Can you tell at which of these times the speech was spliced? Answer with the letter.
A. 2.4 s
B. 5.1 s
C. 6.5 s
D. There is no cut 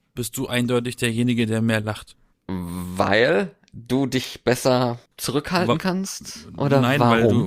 B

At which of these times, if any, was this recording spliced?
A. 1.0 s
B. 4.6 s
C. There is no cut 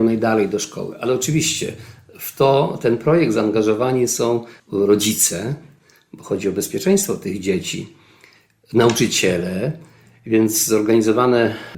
B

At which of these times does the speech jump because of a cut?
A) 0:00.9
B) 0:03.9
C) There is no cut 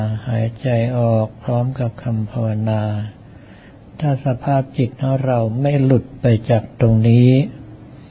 C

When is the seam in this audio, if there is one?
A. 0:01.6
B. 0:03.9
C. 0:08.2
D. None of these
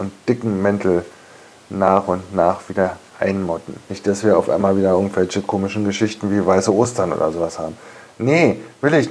B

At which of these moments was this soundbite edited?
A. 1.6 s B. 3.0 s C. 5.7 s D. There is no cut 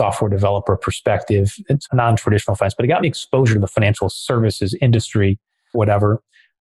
C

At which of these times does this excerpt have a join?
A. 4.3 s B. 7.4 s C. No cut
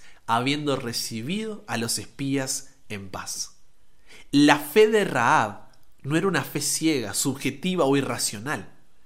C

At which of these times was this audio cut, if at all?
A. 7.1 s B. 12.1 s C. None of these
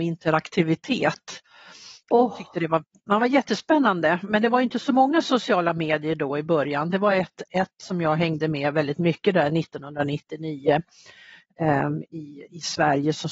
C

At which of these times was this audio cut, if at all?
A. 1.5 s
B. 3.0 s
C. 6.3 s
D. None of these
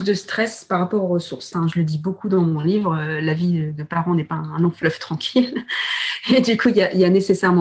A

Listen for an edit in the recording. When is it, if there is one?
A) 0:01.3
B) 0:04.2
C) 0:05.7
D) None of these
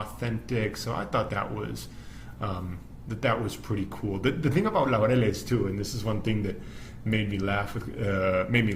A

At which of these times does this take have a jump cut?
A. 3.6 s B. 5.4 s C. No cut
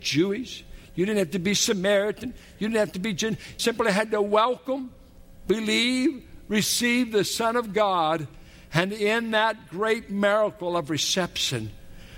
A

